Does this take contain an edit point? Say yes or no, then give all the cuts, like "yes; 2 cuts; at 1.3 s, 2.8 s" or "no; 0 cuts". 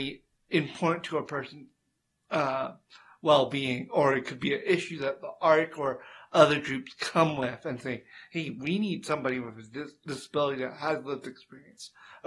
no; 0 cuts